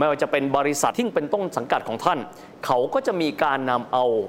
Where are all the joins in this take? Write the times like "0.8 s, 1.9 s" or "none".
0.9 s